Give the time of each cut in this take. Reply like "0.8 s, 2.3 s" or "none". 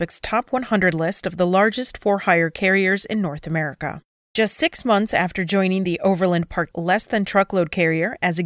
4.4 s, 6.7 s